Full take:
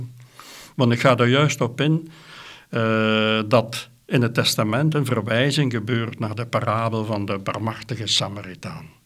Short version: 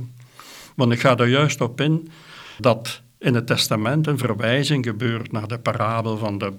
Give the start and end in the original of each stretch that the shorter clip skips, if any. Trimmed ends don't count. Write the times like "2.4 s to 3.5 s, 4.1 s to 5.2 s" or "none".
2.6 s to 3.5 s